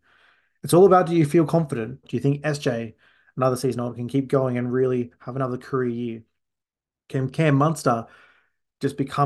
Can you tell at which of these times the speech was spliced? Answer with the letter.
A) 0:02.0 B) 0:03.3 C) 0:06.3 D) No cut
A